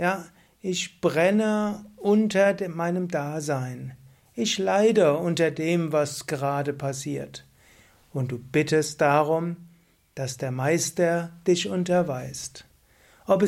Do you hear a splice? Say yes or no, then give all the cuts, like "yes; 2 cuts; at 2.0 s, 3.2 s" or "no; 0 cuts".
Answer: no; 0 cuts